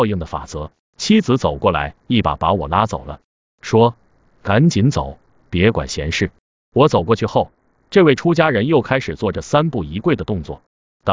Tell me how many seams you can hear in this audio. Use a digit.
0